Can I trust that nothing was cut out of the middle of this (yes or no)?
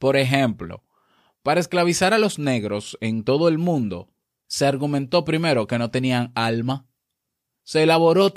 yes